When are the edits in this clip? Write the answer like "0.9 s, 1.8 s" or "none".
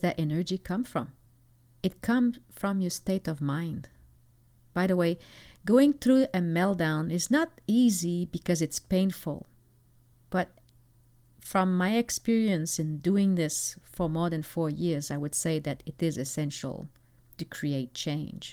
none